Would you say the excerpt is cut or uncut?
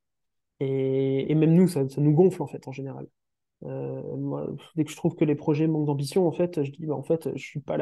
uncut